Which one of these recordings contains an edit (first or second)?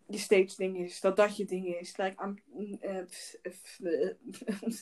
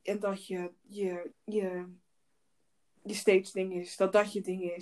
second